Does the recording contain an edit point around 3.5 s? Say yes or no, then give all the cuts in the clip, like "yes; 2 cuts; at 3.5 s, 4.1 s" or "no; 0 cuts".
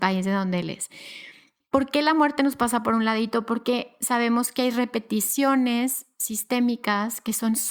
no; 1 cut; at 1.6 s